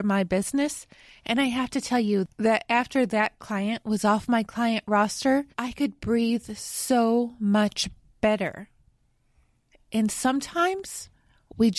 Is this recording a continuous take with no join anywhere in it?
no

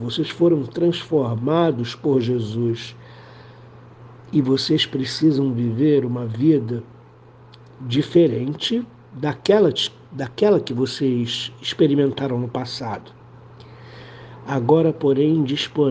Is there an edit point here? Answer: no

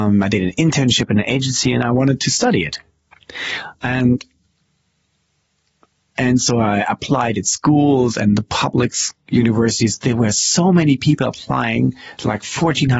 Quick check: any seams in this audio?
no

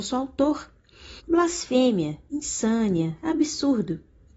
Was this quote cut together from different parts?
yes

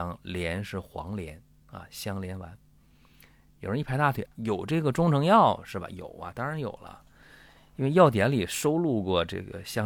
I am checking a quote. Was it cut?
yes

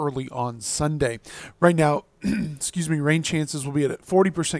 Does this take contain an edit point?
no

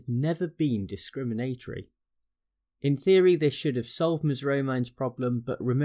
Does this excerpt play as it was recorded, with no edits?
yes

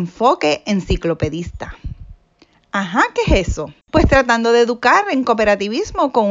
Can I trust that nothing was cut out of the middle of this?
no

